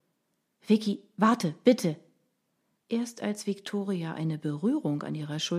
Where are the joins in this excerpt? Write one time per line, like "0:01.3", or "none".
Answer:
none